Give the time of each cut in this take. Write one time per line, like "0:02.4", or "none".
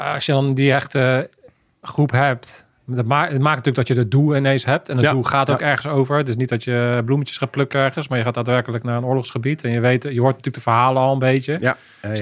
none